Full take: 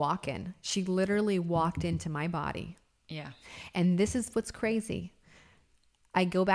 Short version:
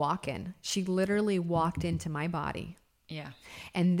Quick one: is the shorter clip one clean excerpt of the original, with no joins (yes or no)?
yes